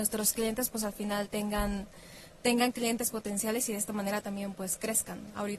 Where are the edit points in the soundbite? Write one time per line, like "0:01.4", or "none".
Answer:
none